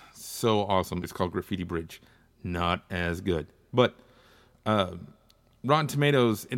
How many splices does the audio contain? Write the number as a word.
one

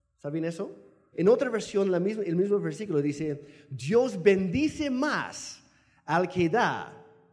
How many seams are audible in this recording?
one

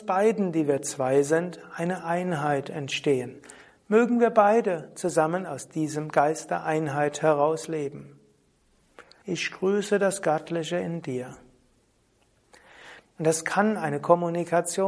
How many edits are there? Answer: two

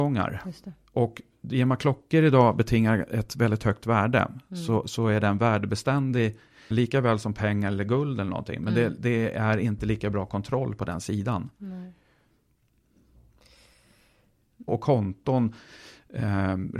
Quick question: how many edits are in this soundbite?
two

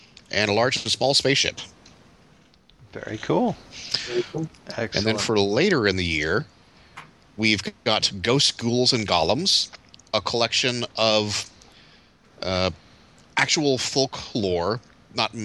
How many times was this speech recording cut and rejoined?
one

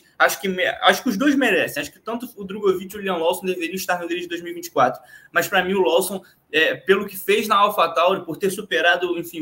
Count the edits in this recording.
zero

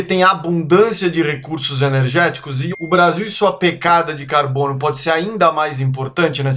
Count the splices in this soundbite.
one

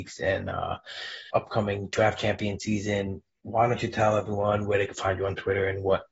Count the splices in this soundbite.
one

